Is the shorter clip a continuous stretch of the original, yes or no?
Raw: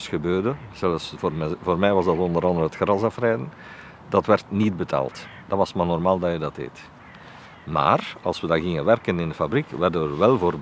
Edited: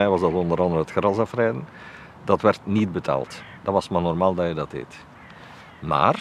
yes